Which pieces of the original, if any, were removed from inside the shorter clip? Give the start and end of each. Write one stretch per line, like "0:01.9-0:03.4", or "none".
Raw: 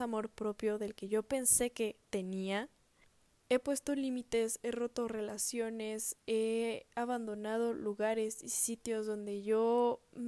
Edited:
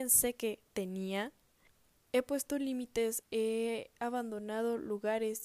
0:04.6-0:06.2